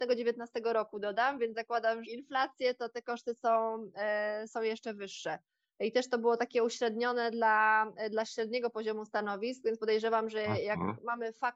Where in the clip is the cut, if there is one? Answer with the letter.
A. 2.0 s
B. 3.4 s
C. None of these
A